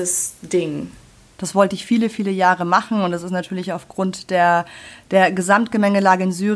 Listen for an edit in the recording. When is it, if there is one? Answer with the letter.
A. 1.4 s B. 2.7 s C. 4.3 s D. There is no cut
A